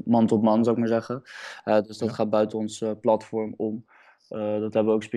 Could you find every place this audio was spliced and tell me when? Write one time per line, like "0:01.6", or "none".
none